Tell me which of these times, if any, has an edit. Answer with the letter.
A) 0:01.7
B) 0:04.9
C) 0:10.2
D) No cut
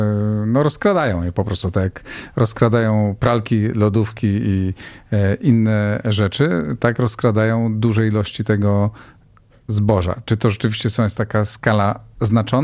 D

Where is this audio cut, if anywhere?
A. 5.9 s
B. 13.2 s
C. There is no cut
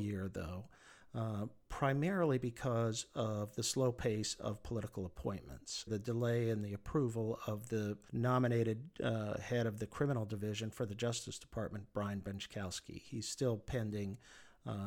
A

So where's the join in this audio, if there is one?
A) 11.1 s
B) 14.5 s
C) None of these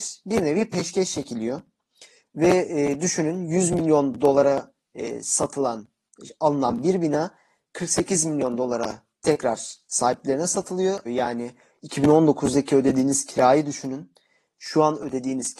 A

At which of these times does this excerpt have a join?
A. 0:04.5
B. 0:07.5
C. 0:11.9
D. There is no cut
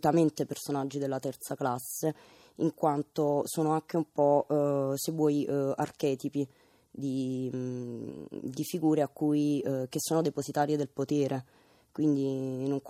D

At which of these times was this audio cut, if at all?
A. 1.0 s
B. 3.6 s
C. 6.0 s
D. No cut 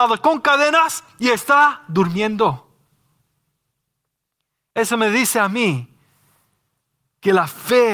D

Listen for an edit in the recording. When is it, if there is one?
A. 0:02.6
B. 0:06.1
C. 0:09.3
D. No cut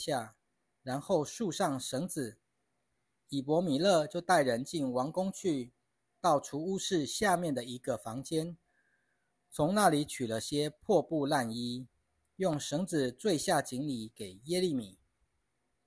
A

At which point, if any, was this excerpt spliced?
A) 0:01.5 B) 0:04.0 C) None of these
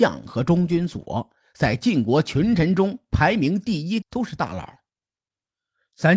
B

